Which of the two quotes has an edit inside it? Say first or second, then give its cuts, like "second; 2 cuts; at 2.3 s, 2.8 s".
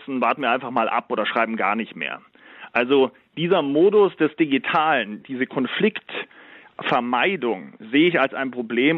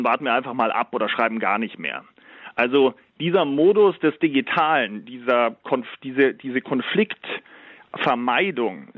first; 1 cut; at 5.2 s